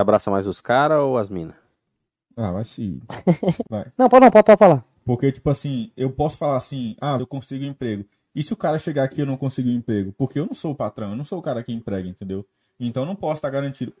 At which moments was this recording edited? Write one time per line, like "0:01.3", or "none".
0:03.6
0:07.2